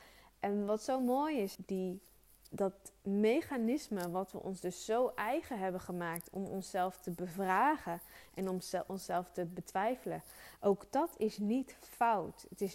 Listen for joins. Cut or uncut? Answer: cut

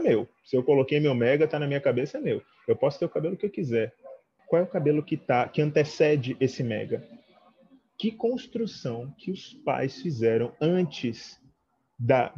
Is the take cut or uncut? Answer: cut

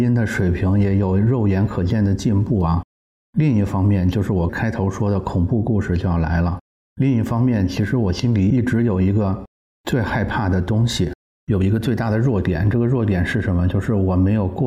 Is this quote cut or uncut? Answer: uncut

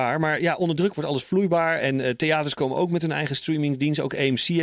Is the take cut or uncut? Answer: uncut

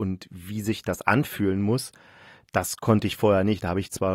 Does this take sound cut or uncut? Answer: uncut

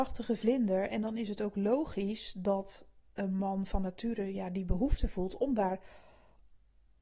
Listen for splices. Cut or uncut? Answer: uncut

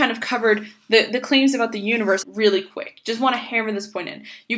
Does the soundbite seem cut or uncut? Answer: cut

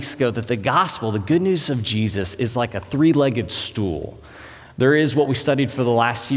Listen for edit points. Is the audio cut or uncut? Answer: uncut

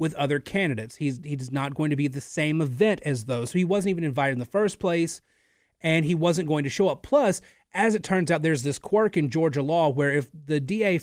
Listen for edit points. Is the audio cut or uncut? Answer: uncut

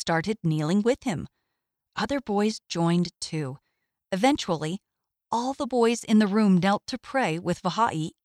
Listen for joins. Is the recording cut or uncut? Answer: uncut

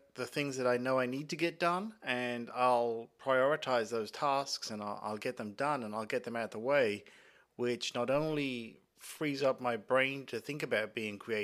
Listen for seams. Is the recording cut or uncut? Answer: uncut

